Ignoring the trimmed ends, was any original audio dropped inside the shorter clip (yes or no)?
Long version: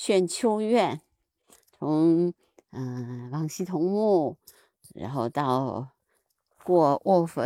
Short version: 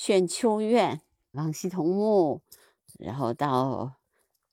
yes